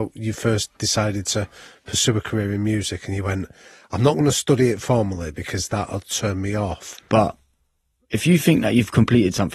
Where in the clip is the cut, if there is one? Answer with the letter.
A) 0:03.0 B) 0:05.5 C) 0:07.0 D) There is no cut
C